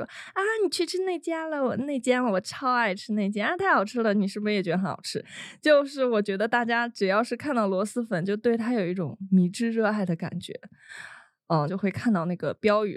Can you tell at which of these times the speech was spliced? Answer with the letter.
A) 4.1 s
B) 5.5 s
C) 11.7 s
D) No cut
C